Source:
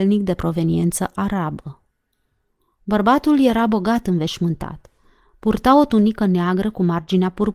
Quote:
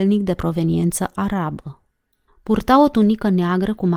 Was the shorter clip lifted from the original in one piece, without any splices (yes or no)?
no